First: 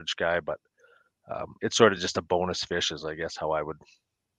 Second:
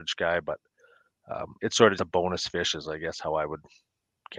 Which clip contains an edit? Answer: second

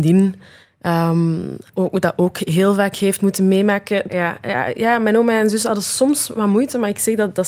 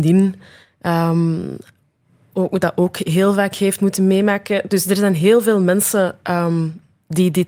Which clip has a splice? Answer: first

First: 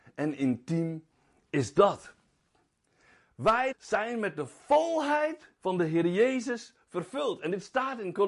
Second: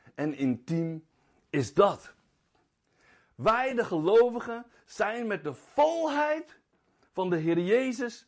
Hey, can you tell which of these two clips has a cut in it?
first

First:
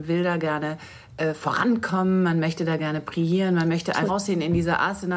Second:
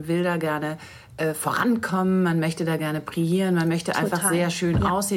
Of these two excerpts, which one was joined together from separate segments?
first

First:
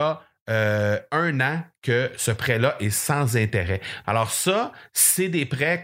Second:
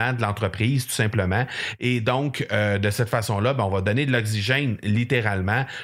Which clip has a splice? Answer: first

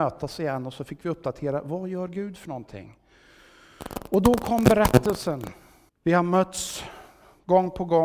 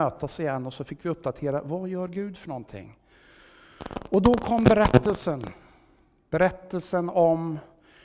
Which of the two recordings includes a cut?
first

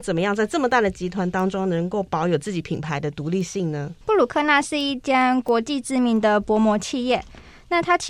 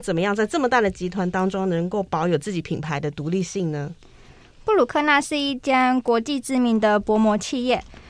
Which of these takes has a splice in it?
first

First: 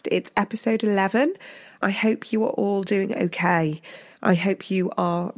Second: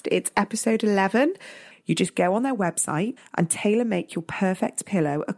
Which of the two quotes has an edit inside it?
second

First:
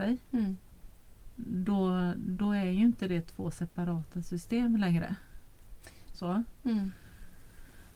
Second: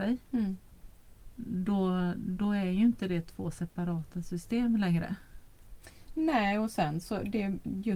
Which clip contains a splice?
first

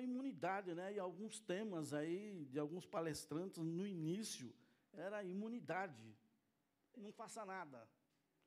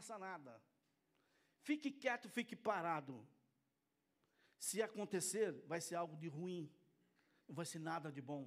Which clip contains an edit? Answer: first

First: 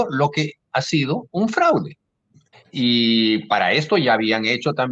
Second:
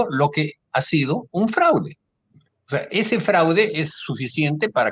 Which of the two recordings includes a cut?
first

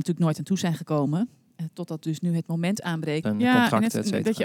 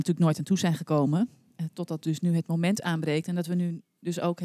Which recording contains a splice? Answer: first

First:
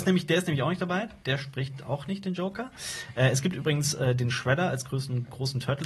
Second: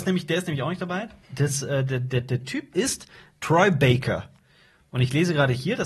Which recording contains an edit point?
second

